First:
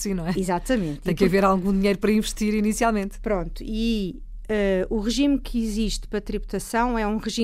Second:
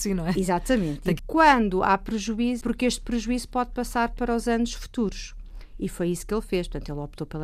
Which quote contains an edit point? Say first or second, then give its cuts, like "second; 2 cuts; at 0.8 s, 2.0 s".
second; 2 cuts; at 1.2 s, 2.6 s